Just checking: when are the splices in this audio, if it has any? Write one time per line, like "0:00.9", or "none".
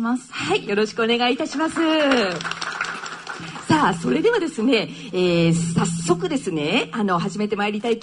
none